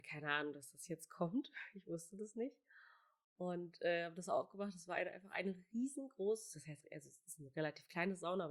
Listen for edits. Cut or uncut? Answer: uncut